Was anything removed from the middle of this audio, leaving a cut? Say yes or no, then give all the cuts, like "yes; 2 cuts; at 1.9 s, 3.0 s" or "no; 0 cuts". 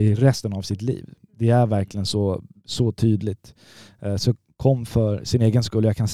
no; 0 cuts